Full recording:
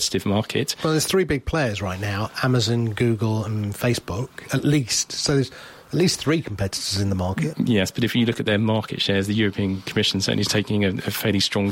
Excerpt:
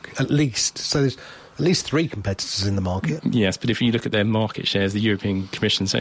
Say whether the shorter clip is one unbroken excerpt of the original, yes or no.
yes